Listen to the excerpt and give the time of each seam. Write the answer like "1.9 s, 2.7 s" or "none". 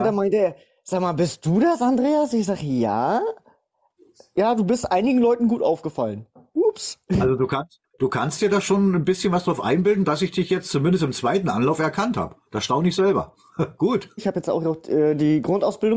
12.5 s, 14.2 s

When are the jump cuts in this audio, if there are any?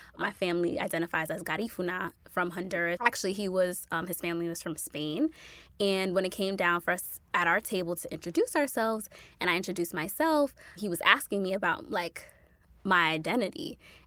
3.0 s

